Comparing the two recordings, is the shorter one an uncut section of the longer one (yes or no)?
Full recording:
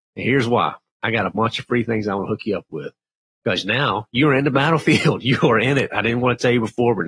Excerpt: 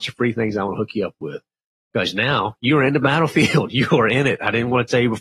yes